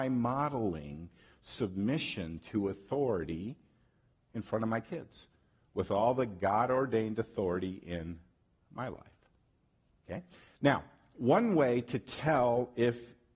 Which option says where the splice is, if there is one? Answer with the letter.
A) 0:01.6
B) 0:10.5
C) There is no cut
B